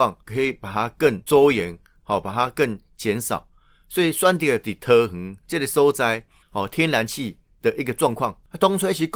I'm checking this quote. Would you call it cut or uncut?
cut